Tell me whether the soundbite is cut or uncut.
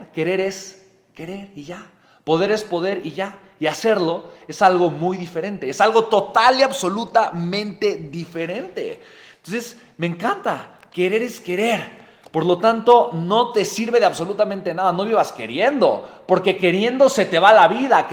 uncut